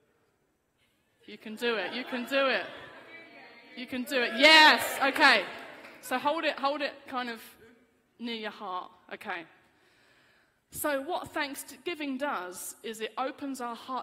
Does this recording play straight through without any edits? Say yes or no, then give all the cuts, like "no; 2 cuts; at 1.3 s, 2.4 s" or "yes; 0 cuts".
yes; 0 cuts